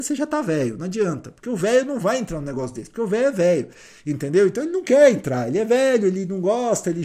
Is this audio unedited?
yes; 0 cuts

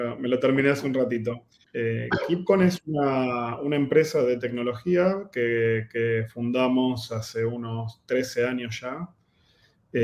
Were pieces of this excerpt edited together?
yes; 1 cut; at 1.6 s

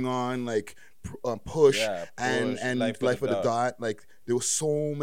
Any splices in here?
no; 0 cuts

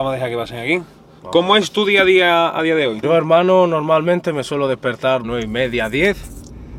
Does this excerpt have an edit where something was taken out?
yes; 2 cuts; at 3.0 s, 5.2 s

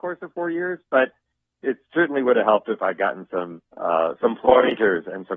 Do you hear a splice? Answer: yes; 1 cut; at 3.7 s

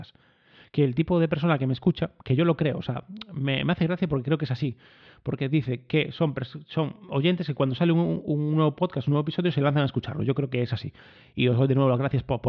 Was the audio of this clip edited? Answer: no; 0 cuts

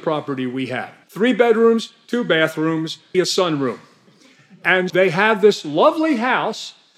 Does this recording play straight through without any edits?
no; 3 cuts; at 1.0 s, 3.1 s, 4.9 s

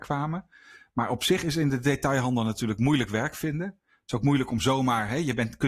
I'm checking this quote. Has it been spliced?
no; 0 cuts

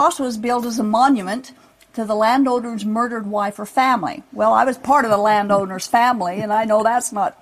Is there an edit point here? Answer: no; 0 cuts

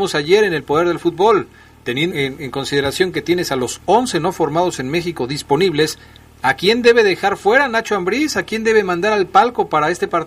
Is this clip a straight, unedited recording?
no; 1 cut; at 2.1 s

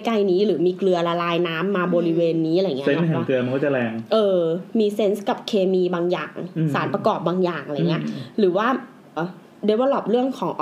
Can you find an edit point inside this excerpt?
yes; 1 cut; at 9.2 s

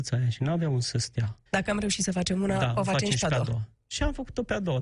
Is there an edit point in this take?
yes; 1 cut; at 1.5 s

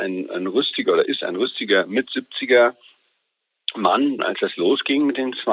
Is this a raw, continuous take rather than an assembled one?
no; 1 cut; at 4.2 s

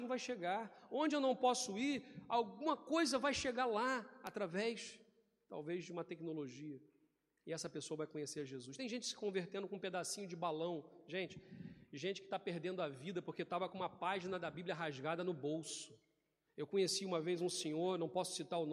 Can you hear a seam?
no; 0 cuts

